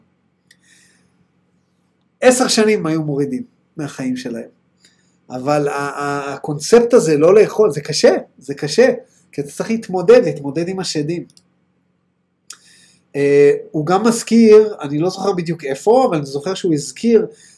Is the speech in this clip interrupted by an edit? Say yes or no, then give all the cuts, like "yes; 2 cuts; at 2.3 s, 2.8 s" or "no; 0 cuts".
no; 0 cuts